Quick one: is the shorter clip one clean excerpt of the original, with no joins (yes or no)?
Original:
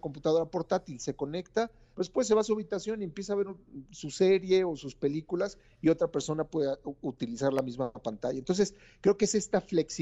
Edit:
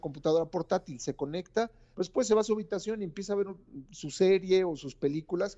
yes